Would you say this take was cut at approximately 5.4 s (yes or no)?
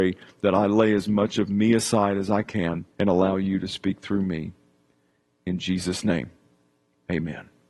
no